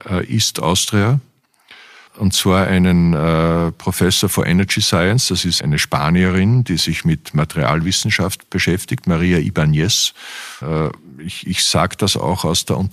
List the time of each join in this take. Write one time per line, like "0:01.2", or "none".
0:02.1
0:05.6
0:10.6